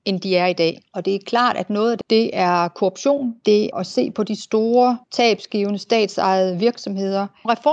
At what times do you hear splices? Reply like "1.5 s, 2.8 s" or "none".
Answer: 2.0 s, 3.7 s

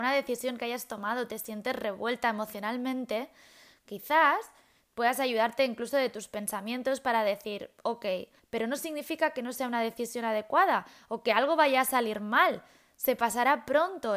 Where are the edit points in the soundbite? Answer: 8.4 s

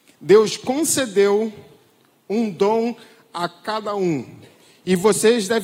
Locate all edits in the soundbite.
none

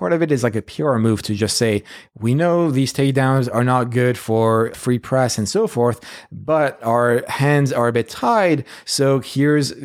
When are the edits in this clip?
none

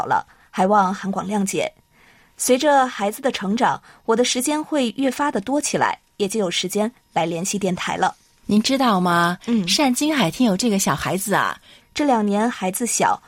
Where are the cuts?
8.4 s, 11.8 s

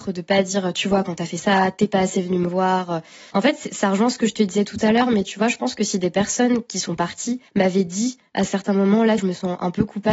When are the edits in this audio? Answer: 3.3 s, 7.5 s, 9.2 s

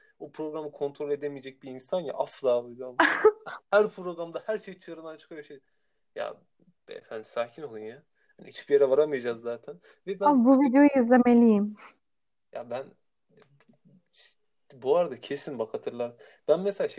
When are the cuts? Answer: none

